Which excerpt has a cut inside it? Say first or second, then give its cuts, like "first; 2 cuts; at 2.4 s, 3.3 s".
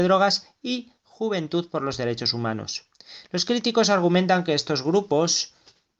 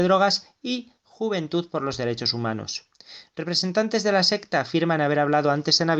first; 1 cut; at 3.2 s